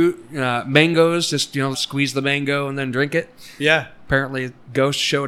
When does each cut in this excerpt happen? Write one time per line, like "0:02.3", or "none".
0:01.7